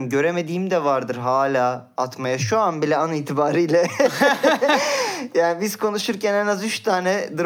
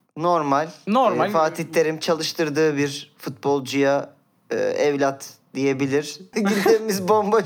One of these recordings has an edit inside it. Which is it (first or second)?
second